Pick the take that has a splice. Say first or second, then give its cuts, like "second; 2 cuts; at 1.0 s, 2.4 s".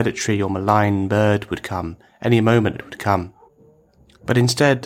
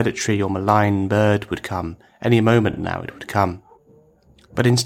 first; 1 cut; at 2.7 s